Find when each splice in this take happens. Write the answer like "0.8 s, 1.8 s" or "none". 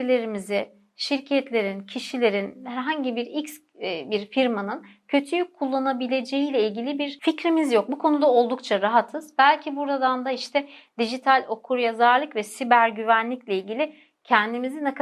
none